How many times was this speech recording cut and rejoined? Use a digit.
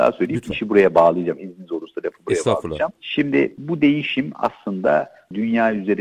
0